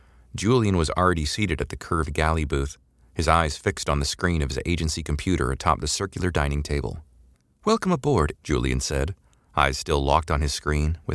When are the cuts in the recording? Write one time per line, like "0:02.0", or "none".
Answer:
0:08.3